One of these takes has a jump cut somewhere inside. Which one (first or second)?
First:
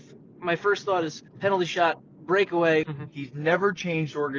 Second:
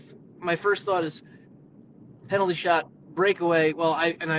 first